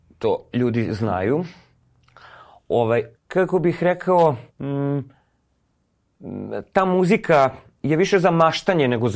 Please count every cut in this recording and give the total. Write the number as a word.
two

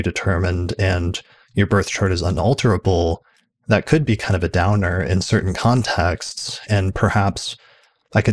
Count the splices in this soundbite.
one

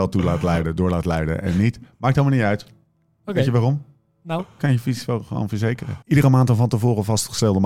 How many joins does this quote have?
one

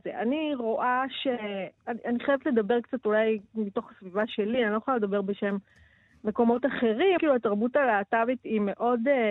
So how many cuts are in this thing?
two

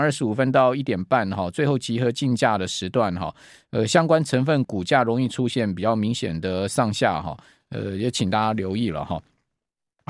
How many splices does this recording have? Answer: one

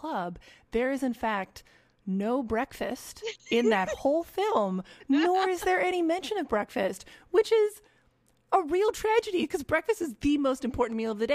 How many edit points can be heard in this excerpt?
zero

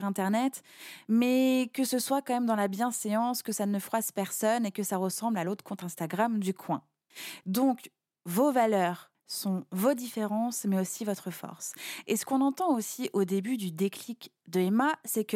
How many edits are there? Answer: zero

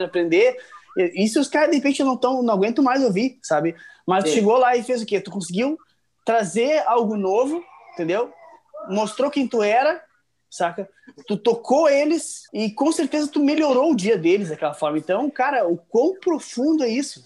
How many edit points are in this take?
one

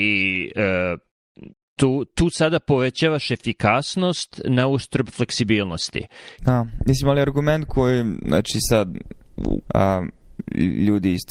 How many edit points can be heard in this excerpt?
two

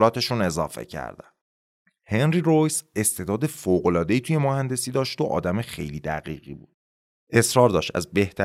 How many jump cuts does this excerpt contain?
zero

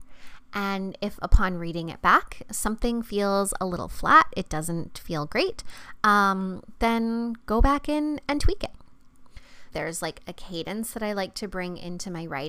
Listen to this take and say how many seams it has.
one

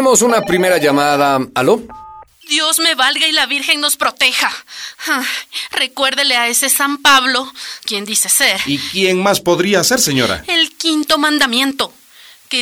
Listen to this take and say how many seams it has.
one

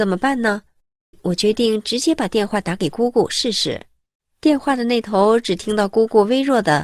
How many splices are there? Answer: one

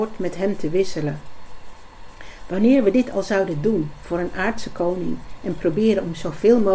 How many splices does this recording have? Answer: zero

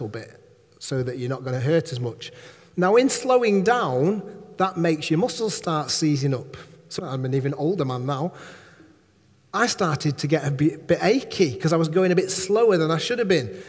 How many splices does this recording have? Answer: one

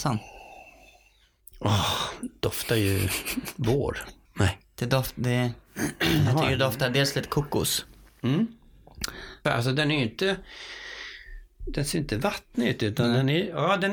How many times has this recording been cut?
two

